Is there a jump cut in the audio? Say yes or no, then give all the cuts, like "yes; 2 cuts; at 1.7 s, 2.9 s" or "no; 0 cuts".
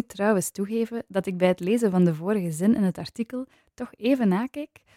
no; 0 cuts